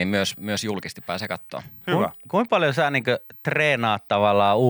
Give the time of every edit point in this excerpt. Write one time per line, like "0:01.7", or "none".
none